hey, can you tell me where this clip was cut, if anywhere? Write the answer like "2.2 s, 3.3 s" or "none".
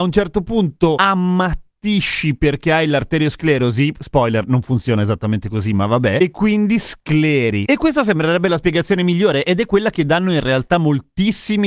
none